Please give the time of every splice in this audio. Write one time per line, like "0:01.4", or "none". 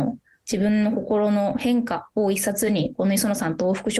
none